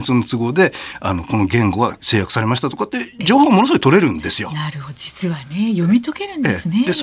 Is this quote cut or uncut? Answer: uncut